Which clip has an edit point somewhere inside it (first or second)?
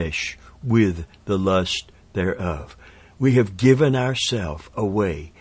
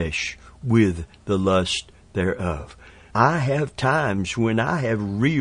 second